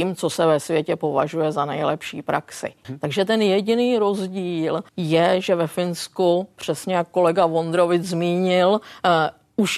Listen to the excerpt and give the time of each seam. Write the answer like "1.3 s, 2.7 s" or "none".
2.8 s, 4.9 s